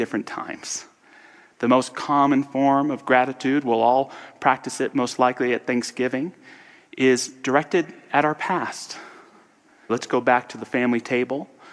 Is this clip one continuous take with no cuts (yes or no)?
no